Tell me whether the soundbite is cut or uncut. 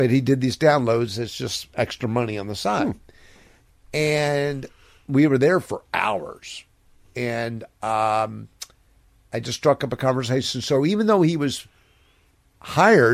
uncut